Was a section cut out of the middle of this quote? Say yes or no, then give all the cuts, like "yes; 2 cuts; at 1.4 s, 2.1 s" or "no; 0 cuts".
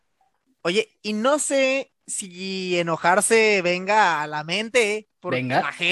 no; 0 cuts